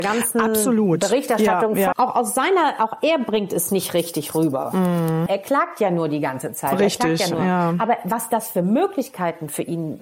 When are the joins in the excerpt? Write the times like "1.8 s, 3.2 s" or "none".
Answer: 1.9 s, 5.3 s